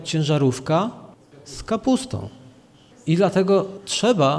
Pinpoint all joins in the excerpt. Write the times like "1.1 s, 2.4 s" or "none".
none

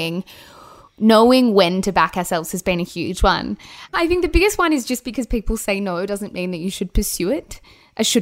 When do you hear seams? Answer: 3.9 s

